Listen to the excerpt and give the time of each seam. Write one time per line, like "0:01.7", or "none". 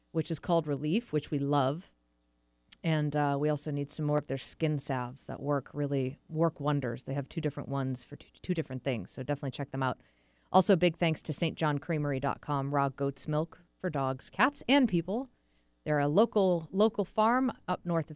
none

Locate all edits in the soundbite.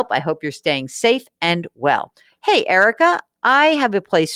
none

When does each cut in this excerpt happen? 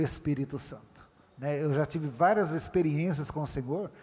none

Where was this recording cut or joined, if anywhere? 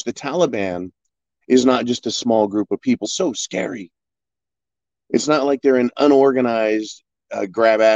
0:03.0

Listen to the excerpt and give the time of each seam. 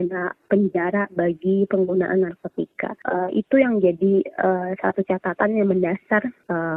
none

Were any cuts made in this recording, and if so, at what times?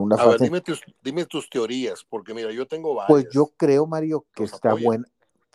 0:04.3

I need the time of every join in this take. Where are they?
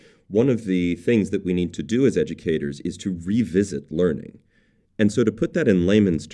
0:04.8

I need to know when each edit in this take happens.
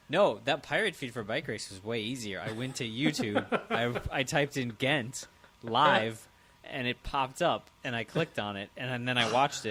none

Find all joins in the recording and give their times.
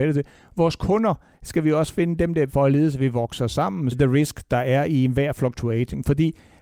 0:02.5
0:03.9

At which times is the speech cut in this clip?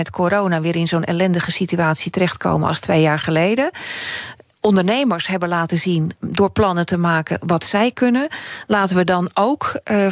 0:08.7

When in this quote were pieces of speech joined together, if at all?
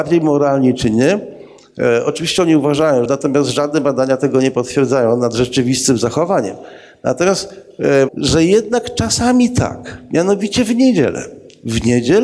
0:03.1
0:08.1

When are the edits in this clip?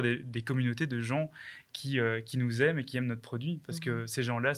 none

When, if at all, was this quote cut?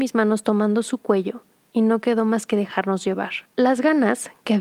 0:03.5

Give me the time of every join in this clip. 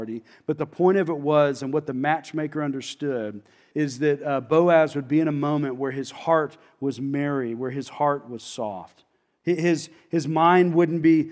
0:03.7
0:09.4

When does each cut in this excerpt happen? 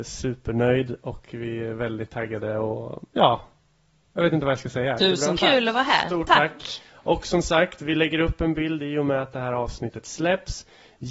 0:05.0

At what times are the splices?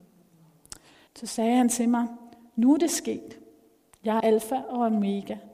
0:01.1
0:04.2

